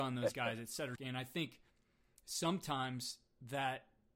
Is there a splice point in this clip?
yes; 1 cut; at 1.0 s

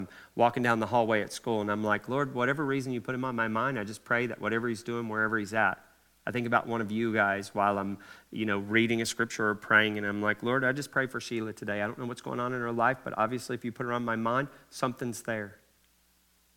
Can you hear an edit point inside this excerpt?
no; 0 cuts

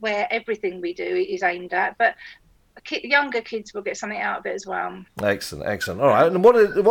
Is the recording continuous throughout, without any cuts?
yes; 0 cuts

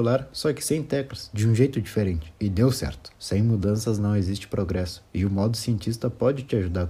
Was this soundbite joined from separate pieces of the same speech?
yes; 1 cut; at 3.1 s

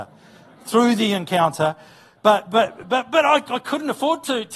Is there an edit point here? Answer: no; 0 cuts

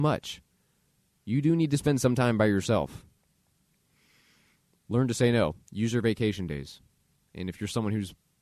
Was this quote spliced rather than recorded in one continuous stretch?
no; 0 cuts

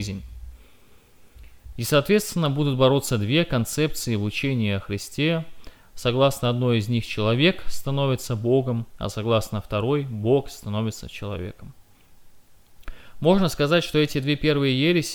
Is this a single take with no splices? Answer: no; 1 cut; at 1.7 s

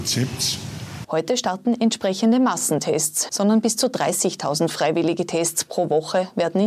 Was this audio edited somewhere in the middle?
yes; 2 cuts; at 1.0 s, 3.3 s

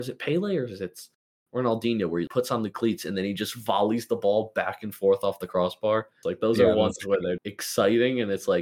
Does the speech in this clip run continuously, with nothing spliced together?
no; 3 cuts; at 2.3 s, 6.2 s, 7.4 s

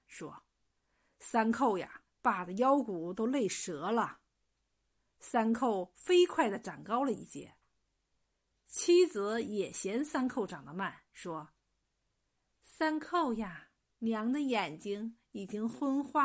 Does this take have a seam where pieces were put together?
yes; 2 cuts; at 2.1 s, 13.9 s

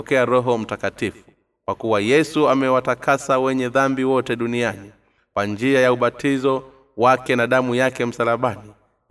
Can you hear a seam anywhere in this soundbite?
no; 0 cuts

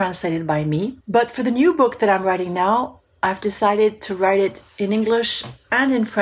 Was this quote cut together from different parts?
no; 0 cuts

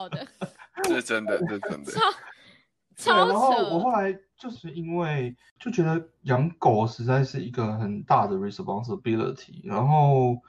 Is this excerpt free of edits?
no; 1 cut; at 4.6 s

